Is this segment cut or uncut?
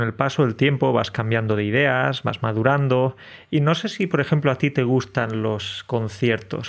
uncut